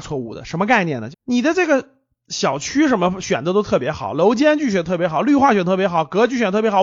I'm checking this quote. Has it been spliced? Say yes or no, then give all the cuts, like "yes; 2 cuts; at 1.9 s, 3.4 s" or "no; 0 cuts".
yes; 1 cut; at 1.1 s